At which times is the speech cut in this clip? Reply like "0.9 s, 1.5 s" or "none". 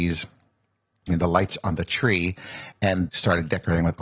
1.1 s, 3.1 s